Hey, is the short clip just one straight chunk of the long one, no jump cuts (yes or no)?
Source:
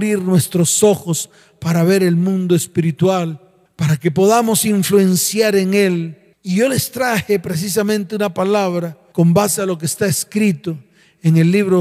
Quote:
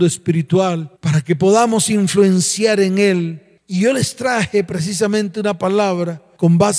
no